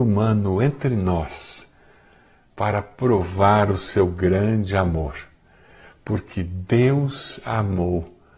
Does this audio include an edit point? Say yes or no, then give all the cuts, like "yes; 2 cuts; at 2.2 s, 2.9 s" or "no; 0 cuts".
no; 0 cuts